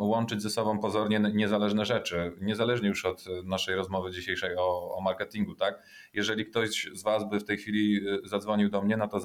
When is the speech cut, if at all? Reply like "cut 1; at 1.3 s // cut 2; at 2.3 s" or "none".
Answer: none